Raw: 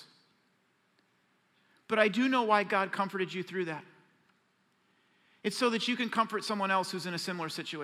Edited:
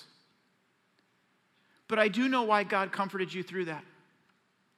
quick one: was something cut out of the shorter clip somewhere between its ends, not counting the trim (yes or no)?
no